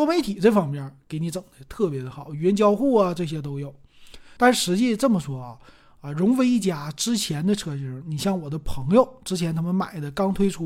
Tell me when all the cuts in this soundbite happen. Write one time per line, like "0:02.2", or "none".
0:04.4

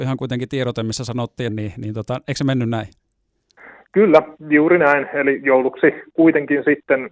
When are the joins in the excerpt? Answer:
0:01.5

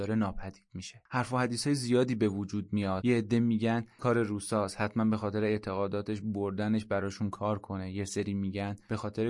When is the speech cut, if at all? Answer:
0:04.0

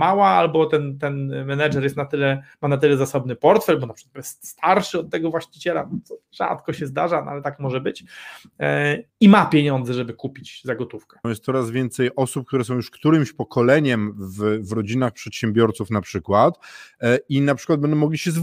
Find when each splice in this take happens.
0:09.1
0:11.2

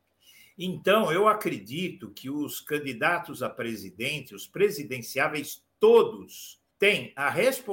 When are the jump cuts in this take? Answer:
0:06.7

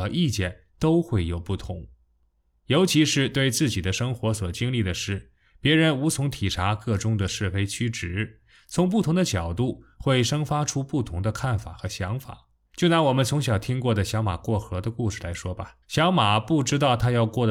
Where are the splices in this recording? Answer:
0:12.6
0:15.8

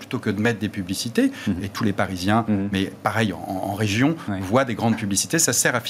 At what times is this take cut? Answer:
0:01.6

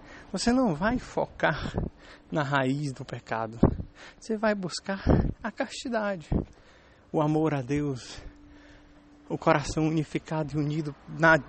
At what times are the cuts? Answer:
none

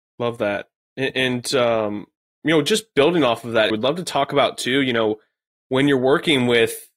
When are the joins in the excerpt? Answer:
0:03.7

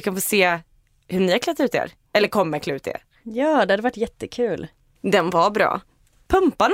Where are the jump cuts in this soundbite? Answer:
0:05.0

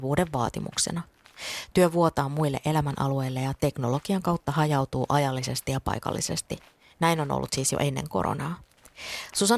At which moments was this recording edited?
none

